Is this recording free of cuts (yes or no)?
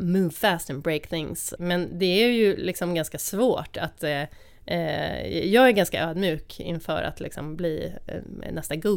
no